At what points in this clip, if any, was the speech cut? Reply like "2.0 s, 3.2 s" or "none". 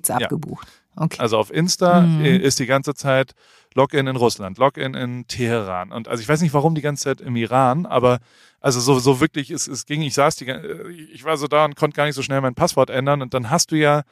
1.2 s